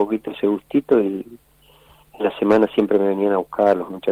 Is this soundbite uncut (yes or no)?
yes